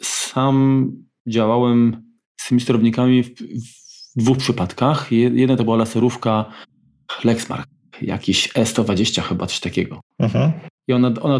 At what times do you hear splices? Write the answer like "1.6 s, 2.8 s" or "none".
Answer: none